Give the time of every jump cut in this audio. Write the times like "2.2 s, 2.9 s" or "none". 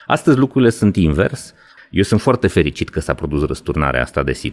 1.8 s